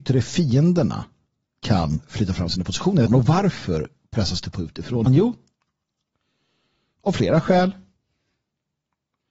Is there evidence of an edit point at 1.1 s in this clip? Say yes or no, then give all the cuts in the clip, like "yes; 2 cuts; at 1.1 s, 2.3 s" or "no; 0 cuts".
no; 2 cuts; at 3.1 s, 5.1 s